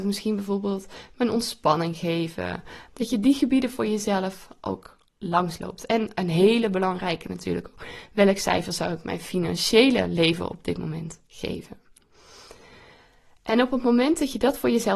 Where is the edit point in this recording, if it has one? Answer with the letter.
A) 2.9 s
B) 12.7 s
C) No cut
A